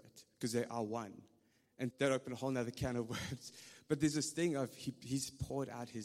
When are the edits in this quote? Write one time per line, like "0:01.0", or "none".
0:01.9